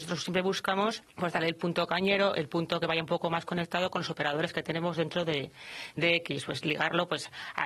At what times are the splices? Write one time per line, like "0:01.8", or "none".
0:01.1